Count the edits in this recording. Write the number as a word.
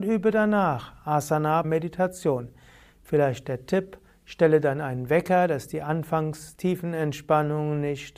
one